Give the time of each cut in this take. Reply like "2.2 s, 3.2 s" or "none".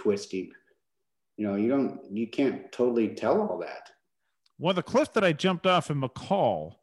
none